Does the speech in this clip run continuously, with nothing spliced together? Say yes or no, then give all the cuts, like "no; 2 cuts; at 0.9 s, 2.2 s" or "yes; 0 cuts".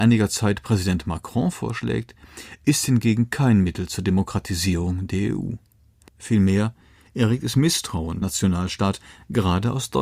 no; 2 cuts; at 6.1 s, 8.2 s